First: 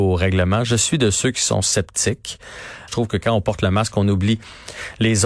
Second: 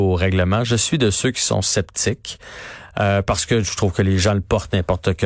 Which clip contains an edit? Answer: first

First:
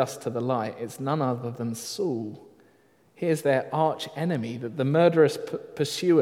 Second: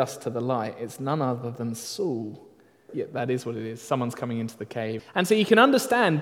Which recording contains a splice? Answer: second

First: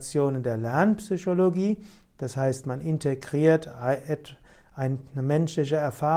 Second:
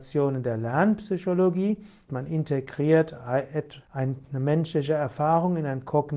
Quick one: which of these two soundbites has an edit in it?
second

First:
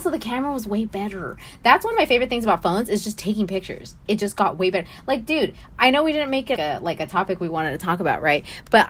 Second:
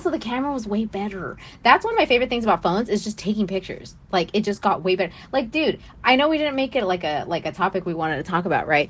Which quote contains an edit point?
first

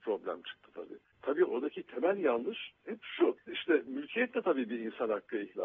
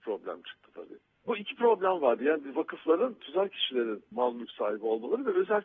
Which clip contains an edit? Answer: first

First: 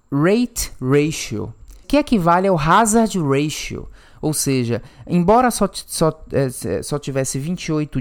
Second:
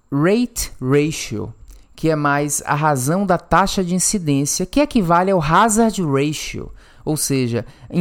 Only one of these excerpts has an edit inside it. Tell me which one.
first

